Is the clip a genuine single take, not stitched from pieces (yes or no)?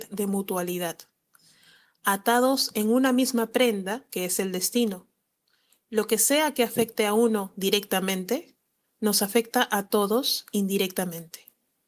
yes